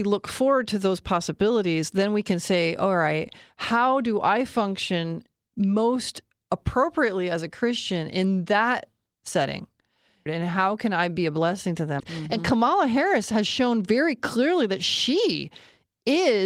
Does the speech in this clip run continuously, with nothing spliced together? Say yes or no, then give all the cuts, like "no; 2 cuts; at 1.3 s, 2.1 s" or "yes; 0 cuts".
no; 2 cuts; at 10.3 s, 12.0 s